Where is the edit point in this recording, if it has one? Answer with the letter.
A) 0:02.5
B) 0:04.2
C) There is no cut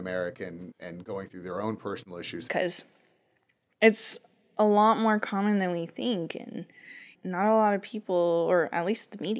A